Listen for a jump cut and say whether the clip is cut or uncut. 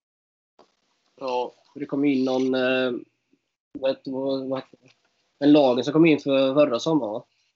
uncut